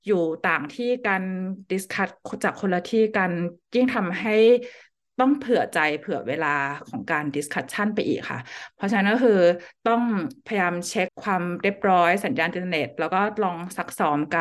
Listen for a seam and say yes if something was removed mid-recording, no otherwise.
yes